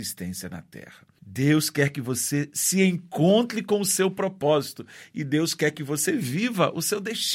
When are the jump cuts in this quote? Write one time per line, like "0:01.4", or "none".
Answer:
0:01.2